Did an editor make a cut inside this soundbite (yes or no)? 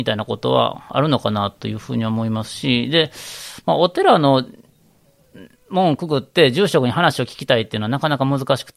no